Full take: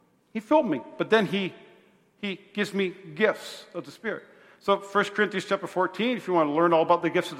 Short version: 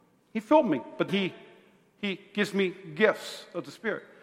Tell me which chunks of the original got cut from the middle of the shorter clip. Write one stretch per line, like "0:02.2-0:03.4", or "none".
0:01.1-0:01.3